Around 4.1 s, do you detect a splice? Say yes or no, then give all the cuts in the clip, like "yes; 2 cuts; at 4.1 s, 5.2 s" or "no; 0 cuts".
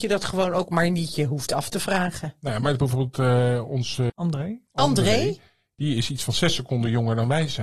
yes; 1 cut; at 4.1 s